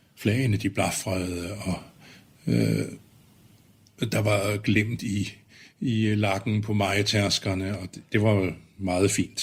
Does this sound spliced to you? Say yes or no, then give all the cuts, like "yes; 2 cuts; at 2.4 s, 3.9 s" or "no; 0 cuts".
no; 0 cuts